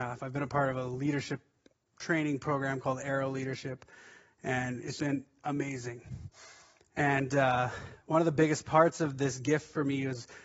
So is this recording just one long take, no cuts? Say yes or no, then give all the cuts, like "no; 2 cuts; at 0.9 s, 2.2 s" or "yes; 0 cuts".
no; 1 cut; at 5.0 s